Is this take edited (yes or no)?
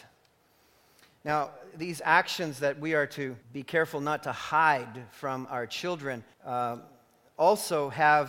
yes